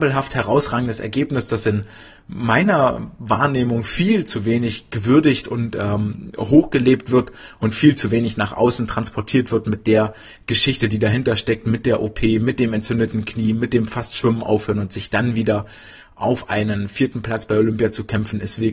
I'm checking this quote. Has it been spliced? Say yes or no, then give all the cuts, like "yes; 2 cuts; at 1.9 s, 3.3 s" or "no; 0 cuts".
no; 0 cuts